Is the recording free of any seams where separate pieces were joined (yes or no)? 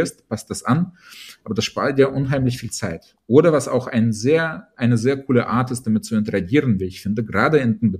yes